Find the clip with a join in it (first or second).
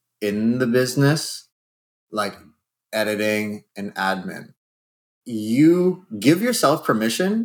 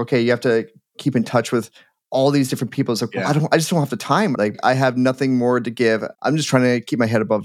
second